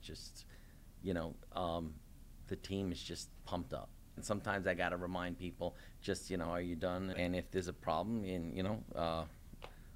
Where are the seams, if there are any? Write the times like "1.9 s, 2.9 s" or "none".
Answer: 4.2 s, 7.1 s